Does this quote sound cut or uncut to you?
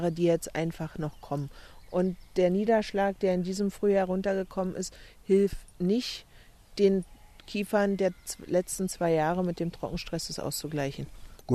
uncut